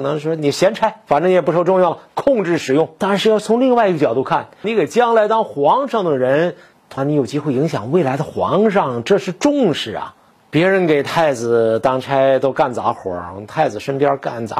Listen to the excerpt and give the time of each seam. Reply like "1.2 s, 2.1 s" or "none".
4.6 s, 7.0 s